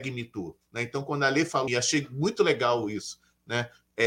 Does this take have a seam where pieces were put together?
yes; 1 cut; at 1.7 s

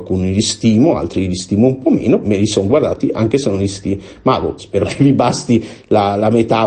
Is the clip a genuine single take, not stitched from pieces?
no; 2 cuts; at 2.2 s, 4.6 s

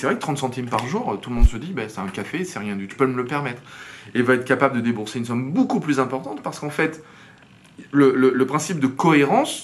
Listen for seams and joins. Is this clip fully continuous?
no; 1 cut; at 2.9 s

